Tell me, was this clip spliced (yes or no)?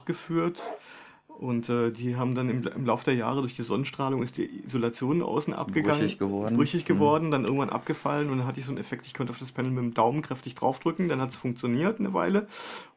no